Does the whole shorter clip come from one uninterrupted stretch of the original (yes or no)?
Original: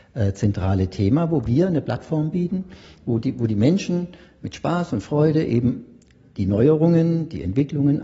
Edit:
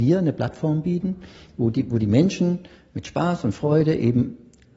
yes